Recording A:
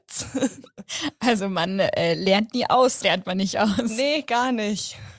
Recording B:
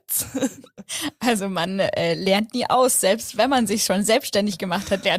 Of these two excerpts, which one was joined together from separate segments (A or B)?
A